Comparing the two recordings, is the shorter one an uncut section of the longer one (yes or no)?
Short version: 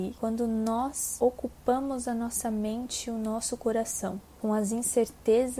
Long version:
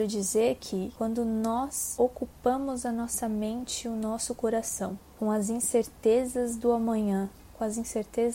yes